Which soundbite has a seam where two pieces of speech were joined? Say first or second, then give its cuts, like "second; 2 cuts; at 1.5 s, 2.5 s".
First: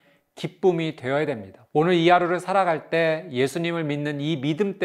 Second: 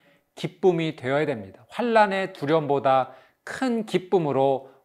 first; 1 cut; at 1.7 s